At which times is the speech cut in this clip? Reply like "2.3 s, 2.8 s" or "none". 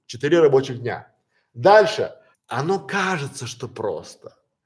2.3 s